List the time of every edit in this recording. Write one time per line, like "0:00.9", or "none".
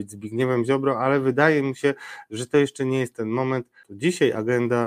0:03.8

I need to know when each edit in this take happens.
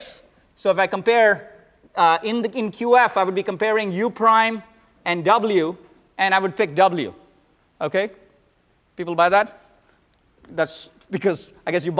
none

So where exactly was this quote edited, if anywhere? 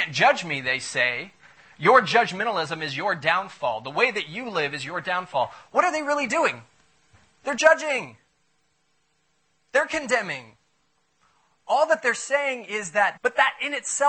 0:13.2

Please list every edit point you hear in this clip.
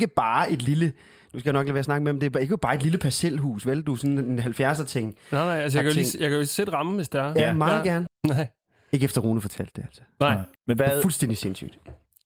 0:08.1
0:10.6

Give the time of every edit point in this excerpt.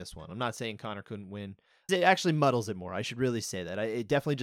0:01.9

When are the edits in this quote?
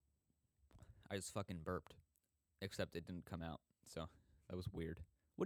none

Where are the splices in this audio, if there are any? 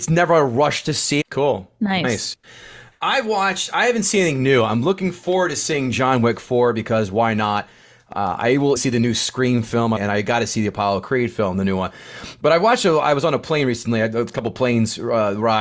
0:01.2
0:08.8
0:10.0

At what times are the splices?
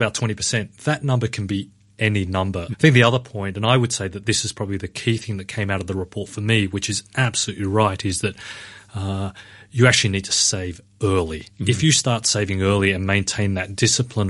0:02.7
0:11.5

